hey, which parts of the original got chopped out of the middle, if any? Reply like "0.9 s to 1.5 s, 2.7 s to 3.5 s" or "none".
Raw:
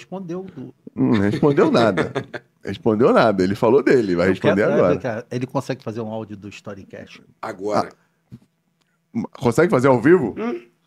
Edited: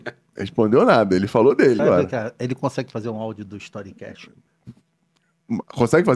4.1 s to 4.7 s, 7.4 s to 8.1 s